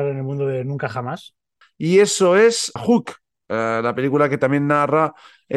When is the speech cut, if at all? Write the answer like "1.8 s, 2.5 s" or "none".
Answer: 1.6 s, 2.8 s

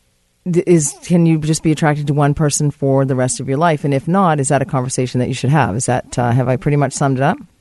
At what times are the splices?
none

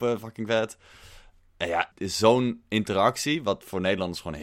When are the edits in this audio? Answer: 1.9 s

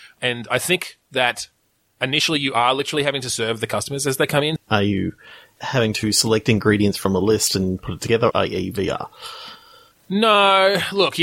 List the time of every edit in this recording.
4.6 s, 8.3 s

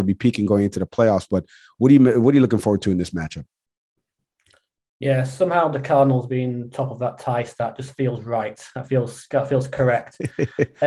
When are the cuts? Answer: none

